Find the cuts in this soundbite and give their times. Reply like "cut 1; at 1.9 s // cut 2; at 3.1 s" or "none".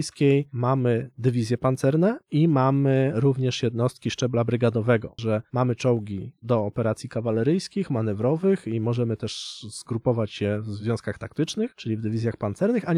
cut 1; at 5.2 s